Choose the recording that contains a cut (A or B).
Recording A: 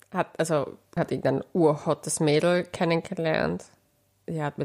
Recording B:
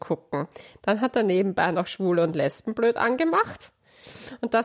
A